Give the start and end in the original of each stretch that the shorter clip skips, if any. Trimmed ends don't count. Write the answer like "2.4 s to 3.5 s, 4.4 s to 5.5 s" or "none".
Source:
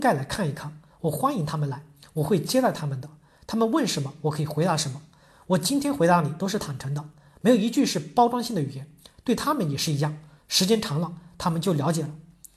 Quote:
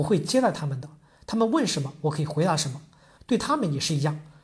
5.4 s to 9.1 s